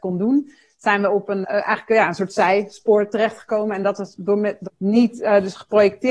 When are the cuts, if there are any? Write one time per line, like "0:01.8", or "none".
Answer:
0:01.4
0:04.7